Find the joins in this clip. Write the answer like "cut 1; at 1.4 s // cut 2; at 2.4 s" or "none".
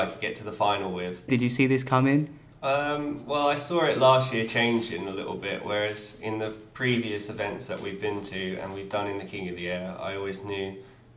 cut 1; at 1.3 s

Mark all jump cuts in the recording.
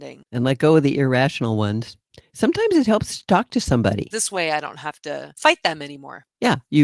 cut 1; at 4.1 s

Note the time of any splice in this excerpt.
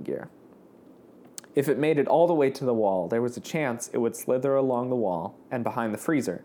none

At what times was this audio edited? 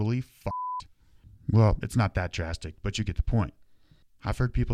none

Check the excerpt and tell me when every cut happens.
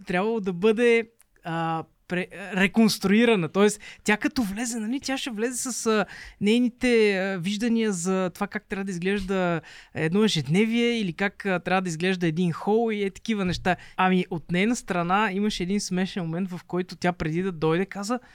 cut 1; at 1.9 s // cut 2; at 13.9 s

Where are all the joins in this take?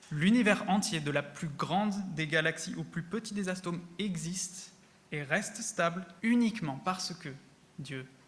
cut 1; at 6.2 s

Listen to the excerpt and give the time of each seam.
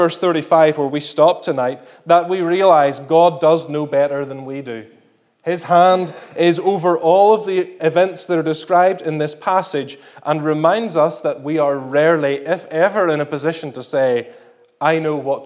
none

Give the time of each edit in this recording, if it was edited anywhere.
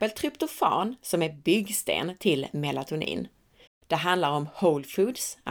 cut 1; at 3.7 s

